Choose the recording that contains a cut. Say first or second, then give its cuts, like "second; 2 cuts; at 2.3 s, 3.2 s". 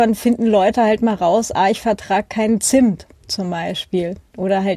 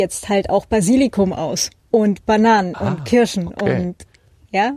second; 1 cut; at 1.8 s